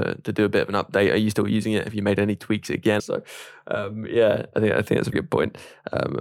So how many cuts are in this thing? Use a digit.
2